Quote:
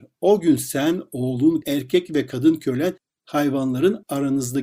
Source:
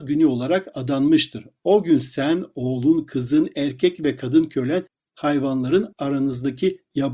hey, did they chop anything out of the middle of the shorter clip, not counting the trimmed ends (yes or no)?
yes